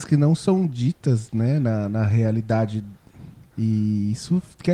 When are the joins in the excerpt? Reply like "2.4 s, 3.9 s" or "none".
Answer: 3.5 s